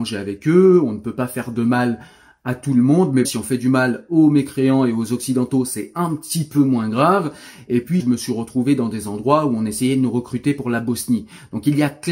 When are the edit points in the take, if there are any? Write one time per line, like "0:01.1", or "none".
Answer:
0:03.2
0:08.0